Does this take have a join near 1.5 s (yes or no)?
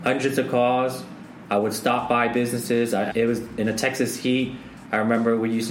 no